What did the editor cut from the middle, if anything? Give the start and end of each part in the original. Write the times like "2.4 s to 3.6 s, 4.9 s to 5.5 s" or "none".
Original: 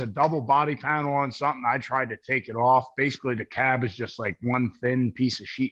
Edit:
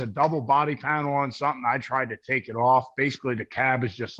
none